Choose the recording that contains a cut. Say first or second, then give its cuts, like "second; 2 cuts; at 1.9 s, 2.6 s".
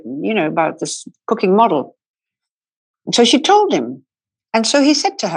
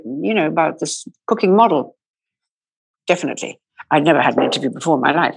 second; 1 cut; at 3.0 s